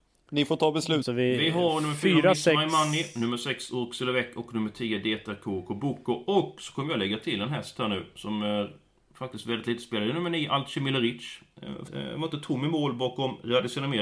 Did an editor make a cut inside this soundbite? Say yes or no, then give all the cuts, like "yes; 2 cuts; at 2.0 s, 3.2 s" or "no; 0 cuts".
yes; 2 cuts; at 1.0 s, 11.9 s